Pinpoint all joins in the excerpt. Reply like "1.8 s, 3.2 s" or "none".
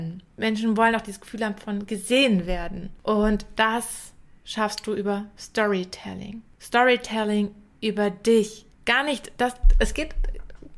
8.7 s